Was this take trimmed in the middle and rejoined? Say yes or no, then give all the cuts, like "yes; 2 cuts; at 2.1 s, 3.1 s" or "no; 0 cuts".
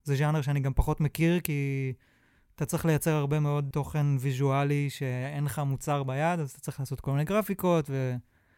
yes; 1 cut; at 3.7 s